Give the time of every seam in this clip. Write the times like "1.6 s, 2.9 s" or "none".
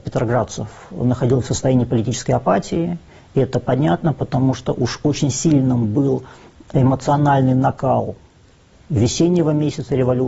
none